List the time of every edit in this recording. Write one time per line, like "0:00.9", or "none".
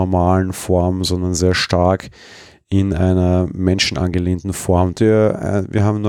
0:04.9